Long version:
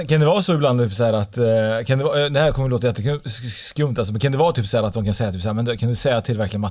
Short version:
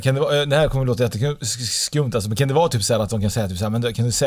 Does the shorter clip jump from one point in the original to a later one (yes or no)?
no